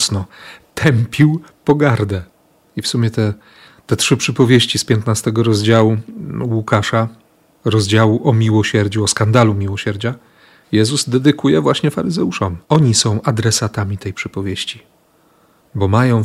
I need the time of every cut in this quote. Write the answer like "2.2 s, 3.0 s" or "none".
2.6 s, 12.6 s